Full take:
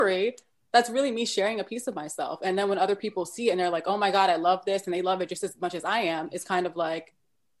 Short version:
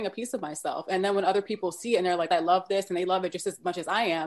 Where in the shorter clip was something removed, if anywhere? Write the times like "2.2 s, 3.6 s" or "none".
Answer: 2.3 s